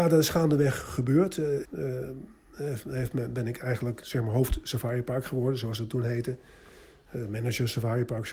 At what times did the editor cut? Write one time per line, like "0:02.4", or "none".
0:01.6